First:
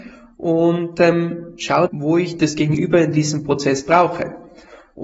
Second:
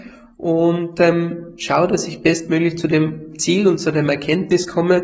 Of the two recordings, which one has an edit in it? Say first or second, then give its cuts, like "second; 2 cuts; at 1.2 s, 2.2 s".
first; 1 cut; at 1.9 s